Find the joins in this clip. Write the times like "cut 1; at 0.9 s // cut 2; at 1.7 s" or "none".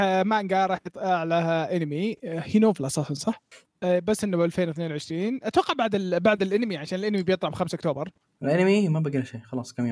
cut 1; at 3.7 s